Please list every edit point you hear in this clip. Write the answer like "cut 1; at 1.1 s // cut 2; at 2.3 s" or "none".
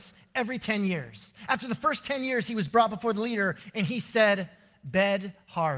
none